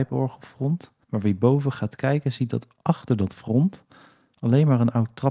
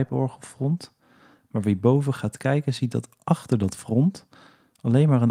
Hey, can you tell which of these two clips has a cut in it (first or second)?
first